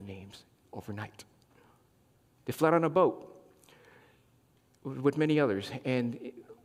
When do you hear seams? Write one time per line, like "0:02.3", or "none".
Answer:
none